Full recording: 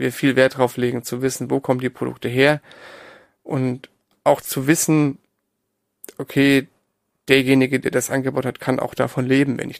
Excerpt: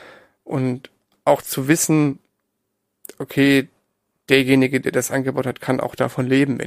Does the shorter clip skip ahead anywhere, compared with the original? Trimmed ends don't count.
no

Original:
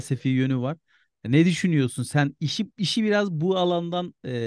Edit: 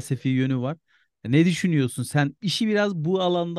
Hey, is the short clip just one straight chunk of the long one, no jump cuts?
no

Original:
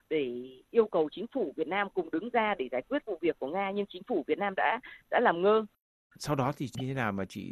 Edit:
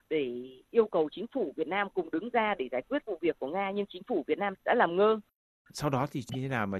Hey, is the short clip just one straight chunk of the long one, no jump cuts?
no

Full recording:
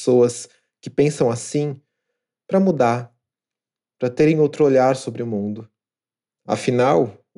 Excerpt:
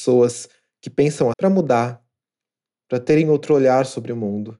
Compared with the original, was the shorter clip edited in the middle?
yes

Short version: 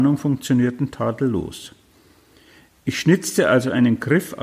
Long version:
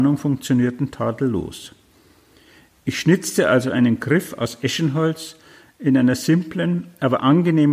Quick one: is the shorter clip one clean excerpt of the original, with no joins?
yes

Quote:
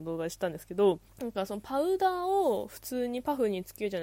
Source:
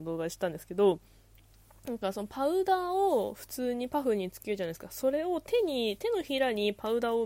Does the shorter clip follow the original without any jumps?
no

